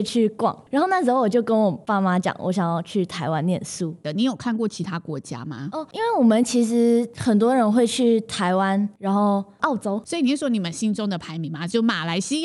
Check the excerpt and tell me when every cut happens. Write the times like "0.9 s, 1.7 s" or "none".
4.0 s

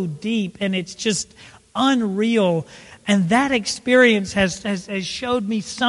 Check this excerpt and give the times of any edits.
none

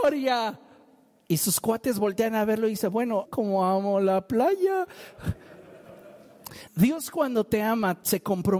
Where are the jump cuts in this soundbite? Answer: 3.3 s, 6.7 s

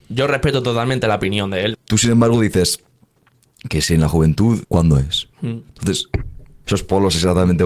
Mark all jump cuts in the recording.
1.7 s, 4.6 s, 6.6 s

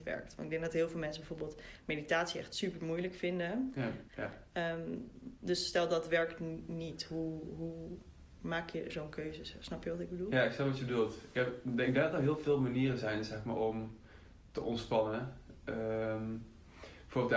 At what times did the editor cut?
4.1 s

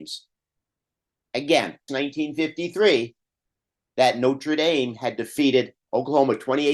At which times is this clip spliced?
1.9 s

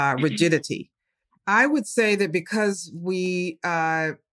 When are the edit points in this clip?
1.3 s

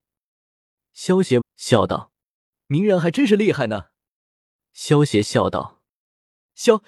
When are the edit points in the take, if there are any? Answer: 1.4 s, 4.2 s

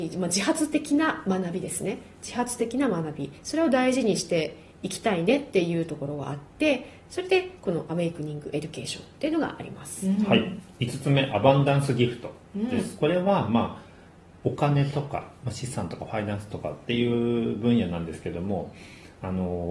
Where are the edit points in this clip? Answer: none

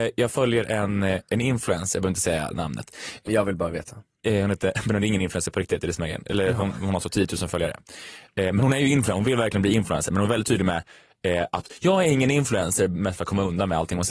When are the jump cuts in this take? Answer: 3.3 s

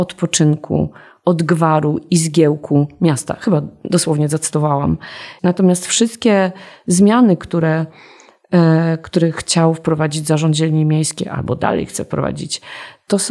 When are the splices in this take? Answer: 5.4 s

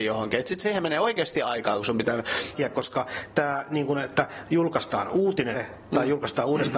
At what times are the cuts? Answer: 2.5 s, 5.5 s

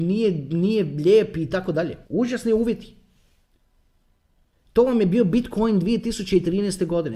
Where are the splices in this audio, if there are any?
2.0 s

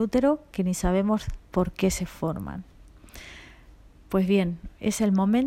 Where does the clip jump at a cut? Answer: none

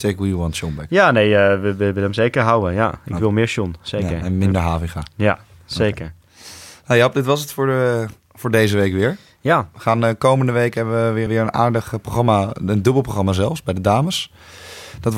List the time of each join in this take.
11.3 s

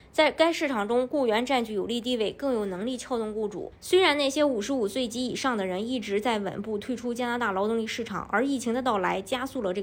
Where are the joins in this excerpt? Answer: 3.7 s

